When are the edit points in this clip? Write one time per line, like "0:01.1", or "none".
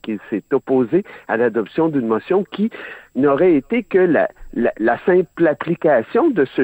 none